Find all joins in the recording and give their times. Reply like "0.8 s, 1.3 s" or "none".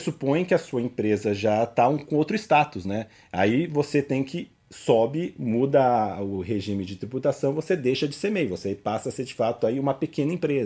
none